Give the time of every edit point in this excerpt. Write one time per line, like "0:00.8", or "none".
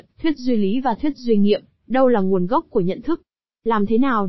0:01.8